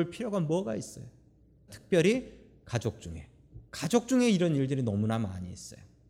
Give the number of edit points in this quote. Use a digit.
2